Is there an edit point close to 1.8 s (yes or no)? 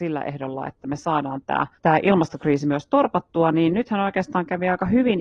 yes